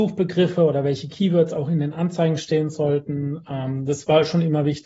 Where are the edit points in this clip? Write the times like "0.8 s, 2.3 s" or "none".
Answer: none